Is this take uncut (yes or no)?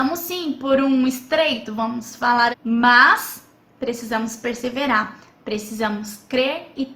no